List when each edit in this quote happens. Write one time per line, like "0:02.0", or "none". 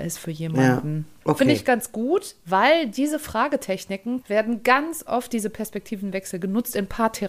0:01.2
0:04.2